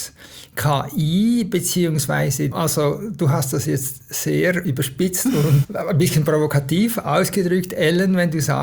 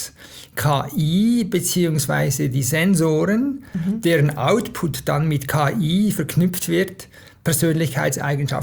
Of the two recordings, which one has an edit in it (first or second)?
first